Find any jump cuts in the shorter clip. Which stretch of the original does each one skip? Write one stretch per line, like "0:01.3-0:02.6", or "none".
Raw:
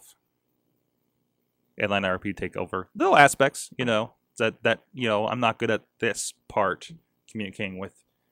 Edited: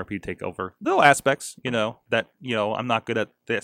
0:04.2-0:04.6

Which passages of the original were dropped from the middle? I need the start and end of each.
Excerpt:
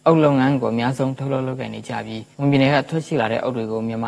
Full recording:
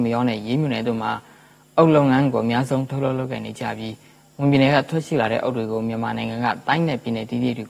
0:04.0-0:04.3

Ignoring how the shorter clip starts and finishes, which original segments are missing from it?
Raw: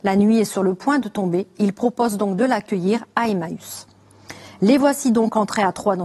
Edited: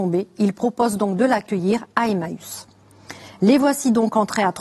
none

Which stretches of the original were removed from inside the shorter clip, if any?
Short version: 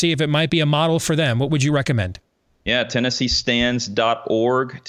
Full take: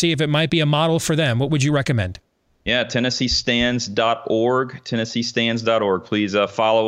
none

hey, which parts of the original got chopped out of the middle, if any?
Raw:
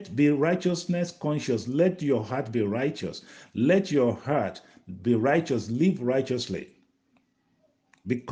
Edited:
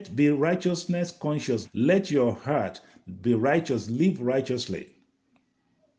0:01.6-0:03.4

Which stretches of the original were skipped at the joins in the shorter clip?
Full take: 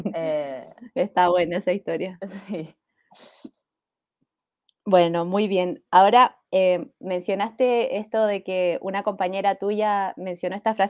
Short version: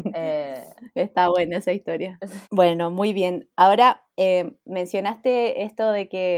0:02.4-0:04.8

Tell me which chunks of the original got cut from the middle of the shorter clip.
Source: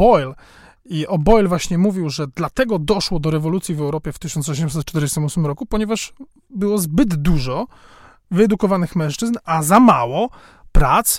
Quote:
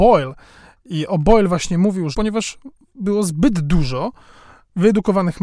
0:02.1-0:05.7

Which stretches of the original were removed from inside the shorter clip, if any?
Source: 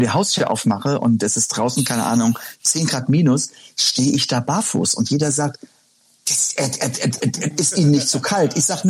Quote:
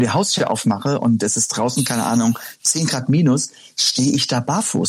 none

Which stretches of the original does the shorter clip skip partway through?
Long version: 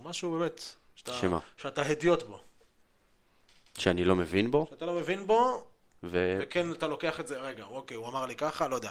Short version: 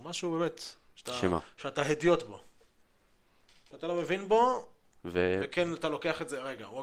0:03.7-0:04.7

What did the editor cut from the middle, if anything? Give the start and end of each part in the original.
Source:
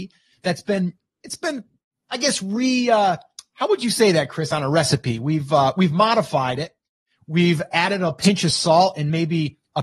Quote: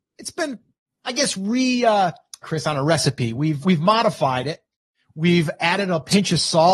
0:03.5-0:04.3
0:05.5-0:05.7

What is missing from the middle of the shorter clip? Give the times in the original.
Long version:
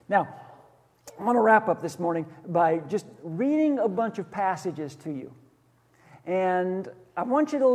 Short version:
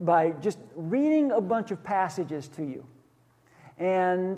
none

